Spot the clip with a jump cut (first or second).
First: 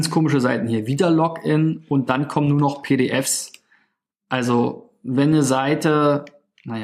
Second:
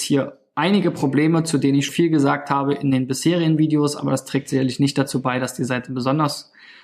second